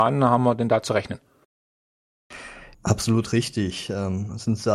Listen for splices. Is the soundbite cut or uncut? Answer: cut